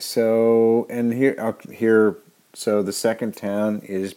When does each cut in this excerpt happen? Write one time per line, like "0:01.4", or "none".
none